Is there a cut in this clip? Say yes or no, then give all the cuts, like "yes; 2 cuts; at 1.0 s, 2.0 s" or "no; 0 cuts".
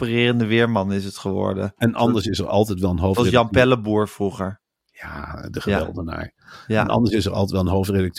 no; 0 cuts